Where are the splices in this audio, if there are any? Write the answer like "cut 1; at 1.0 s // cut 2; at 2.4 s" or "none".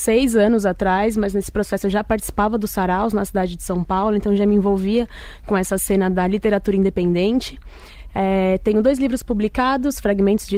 none

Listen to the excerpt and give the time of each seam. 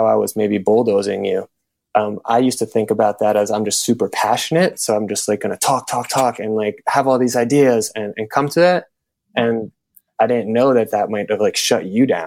none

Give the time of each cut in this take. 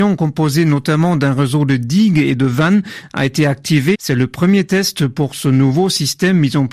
cut 1; at 3.9 s

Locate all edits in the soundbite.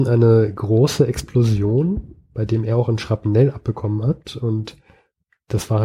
none

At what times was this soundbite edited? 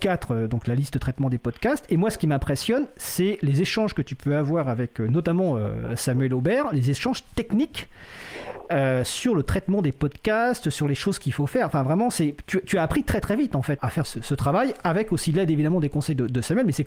none

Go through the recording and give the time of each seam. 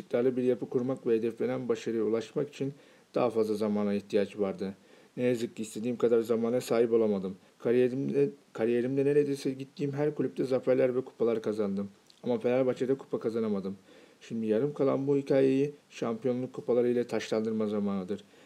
cut 1; at 7.5 s

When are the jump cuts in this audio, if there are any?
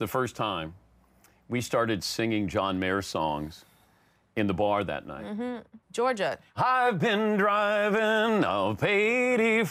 cut 1; at 5.8 s

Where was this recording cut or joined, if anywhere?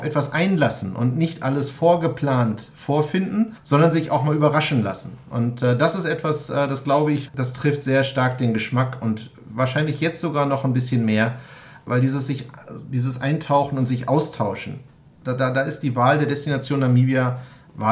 cut 1; at 7.3 s // cut 2; at 15.4 s

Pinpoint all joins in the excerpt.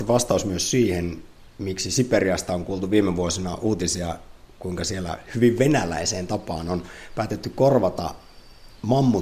none

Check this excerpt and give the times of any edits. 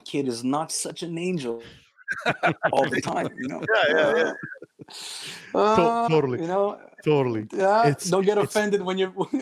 none

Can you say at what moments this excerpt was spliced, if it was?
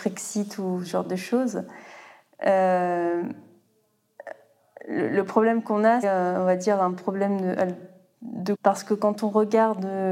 cut 1; at 6.0 s // cut 2; at 8.5 s

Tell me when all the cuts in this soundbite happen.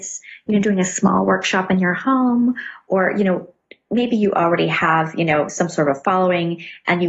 none

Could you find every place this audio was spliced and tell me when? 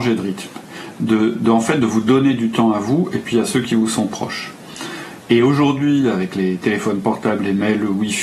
cut 1; at 1.3 s

